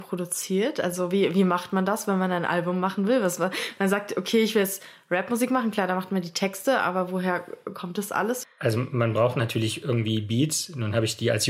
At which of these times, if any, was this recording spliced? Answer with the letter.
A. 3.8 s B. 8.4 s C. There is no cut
B